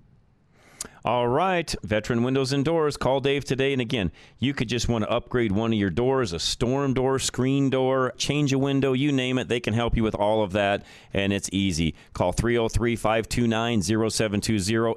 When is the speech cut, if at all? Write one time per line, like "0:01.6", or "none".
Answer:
0:08.1